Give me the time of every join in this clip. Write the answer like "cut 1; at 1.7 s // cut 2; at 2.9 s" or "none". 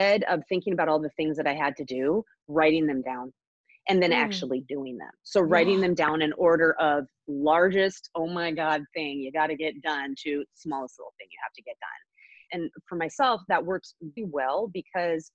cut 1; at 12.5 s // cut 2; at 14.2 s